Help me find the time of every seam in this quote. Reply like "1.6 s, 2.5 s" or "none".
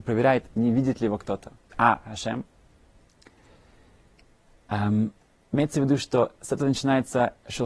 1.7 s